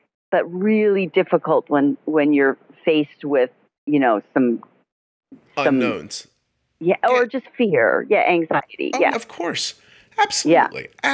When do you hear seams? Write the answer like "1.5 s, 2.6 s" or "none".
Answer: 9.1 s